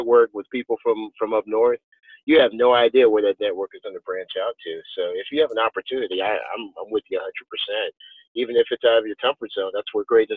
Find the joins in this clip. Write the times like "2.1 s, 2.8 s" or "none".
none